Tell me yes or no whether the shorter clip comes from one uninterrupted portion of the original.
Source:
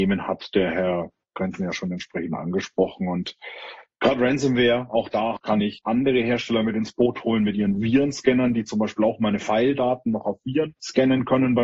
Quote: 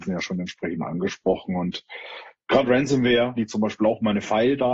no